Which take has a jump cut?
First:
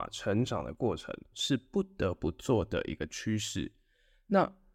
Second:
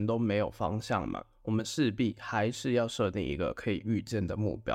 first; 1 cut; at 1.3 s

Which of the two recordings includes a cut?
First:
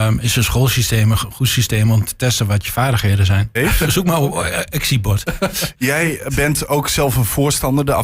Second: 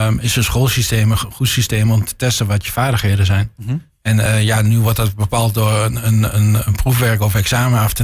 first; 1 cut; at 3.6 s

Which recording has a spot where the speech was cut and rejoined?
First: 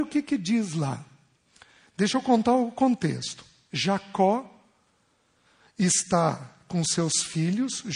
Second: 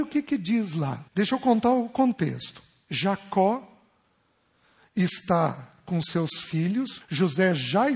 second; 2 cuts; at 1.1 s, 7.0 s

